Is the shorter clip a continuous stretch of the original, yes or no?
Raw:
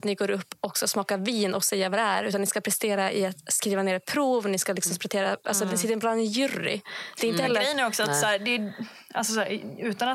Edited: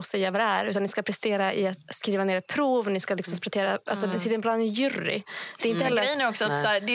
yes